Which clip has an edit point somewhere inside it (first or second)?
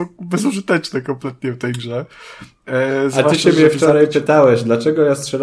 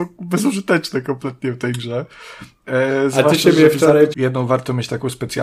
second